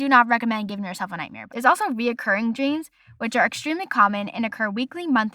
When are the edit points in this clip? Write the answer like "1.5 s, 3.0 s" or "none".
1.5 s